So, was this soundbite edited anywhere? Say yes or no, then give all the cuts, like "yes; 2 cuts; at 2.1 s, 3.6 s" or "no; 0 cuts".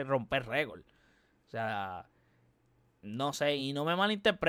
no; 0 cuts